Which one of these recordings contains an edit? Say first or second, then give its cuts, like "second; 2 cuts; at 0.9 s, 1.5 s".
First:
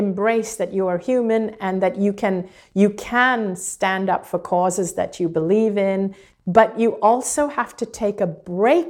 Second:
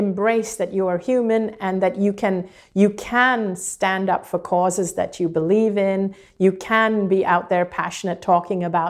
first; 1 cut; at 6.3 s